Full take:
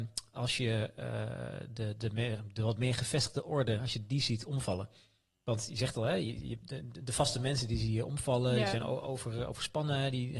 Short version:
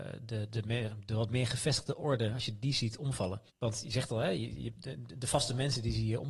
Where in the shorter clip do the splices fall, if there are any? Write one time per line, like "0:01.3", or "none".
0:03.5